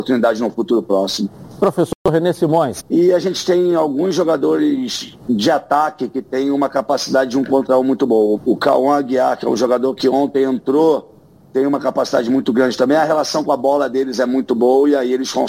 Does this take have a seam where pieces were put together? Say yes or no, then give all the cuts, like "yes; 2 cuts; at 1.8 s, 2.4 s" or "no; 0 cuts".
yes; 2 cuts; at 2.8 s, 8.4 s